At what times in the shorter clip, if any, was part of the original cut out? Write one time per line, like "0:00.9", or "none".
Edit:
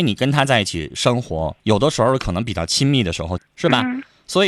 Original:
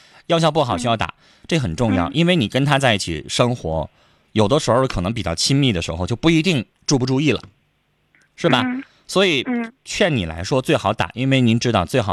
0:01.6
0:03.4